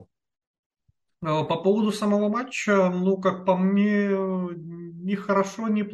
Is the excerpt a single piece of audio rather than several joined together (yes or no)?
yes